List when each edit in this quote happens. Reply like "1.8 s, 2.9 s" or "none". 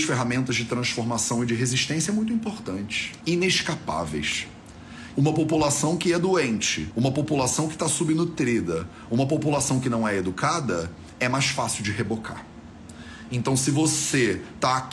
5.1 s